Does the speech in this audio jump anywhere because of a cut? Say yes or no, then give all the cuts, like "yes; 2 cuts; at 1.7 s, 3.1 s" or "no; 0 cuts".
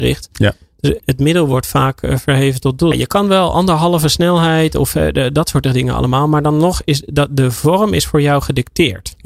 yes; 2 cuts; at 1.0 s, 2.9 s